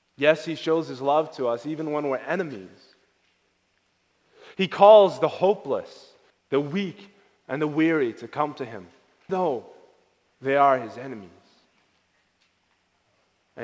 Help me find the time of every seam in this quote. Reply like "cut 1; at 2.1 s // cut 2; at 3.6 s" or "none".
cut 1; at 6.3 s // cut 2; at 9.3 s